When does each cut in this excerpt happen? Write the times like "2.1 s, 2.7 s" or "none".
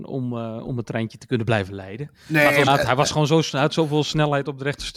2.7 s